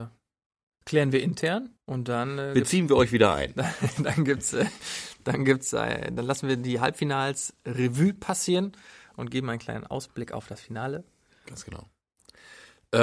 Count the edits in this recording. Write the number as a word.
one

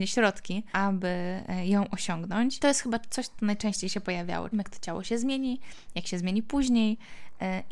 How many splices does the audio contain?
two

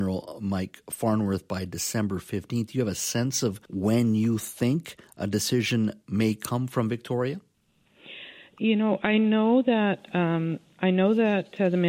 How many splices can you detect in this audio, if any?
one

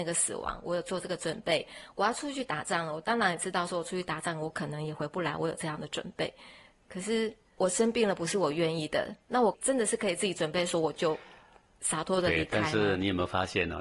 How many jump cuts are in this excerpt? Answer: zero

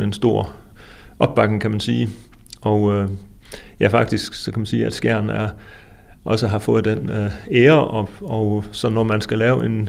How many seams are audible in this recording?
zero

